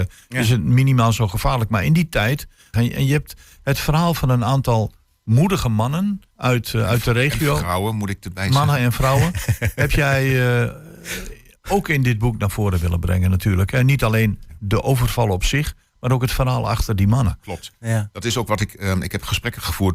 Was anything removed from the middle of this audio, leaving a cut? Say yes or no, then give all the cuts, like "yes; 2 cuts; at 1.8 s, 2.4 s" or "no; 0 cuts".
yes; 2 cuts; at 2.7 s, 6.3 s